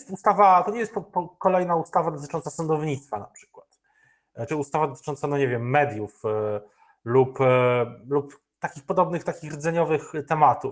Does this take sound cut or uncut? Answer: cut